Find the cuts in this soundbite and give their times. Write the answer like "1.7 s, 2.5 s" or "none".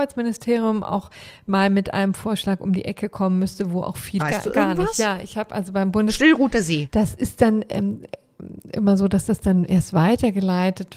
4.2 s, 6.9 s